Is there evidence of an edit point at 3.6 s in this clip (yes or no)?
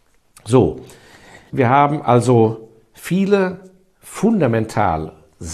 no